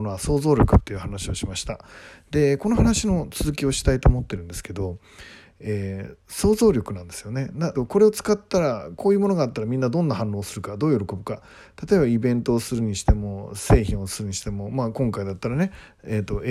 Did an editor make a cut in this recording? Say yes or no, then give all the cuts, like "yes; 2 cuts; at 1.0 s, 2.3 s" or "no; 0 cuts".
yes; 1 cut; at 7.8 s